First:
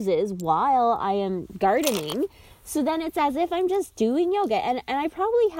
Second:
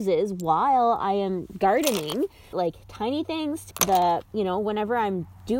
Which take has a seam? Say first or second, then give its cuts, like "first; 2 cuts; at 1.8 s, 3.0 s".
second; 2 cuts; at 2.5 s, 3.7 s